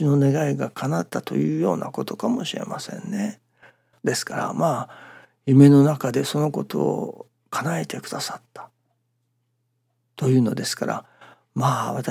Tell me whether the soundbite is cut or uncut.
cut